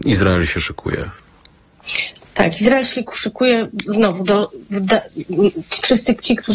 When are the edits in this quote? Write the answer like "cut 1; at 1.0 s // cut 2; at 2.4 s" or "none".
none